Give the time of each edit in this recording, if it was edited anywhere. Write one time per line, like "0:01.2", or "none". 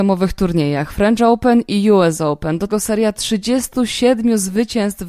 0:02.7